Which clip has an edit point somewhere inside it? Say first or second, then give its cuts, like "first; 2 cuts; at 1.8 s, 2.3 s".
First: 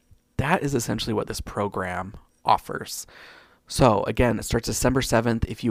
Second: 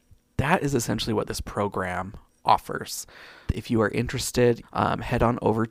second; 2 cuts; at 3.5 s, 4.6 s